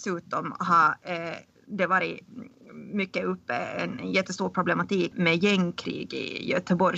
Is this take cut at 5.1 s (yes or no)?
yes